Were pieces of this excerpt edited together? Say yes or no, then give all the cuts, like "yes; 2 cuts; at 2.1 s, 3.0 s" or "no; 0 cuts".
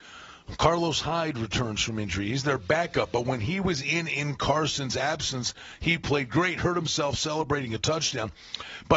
no; 0 cuts